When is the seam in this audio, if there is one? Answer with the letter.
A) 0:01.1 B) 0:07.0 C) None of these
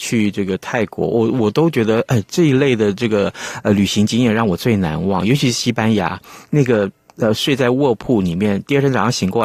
C